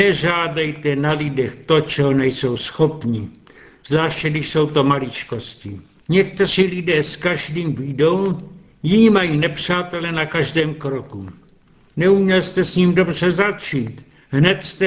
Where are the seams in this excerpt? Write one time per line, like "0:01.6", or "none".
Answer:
0:06.0
0:11.9